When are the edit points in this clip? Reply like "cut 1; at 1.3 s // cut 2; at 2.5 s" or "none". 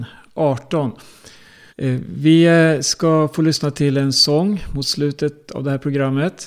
cut 1; at 1.7 s